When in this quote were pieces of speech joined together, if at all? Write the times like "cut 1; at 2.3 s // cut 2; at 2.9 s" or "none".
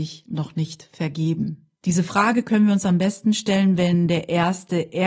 cut 1; at 1.8 s